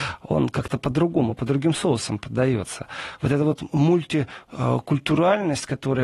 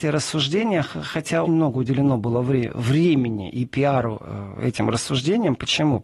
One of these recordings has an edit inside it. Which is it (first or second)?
second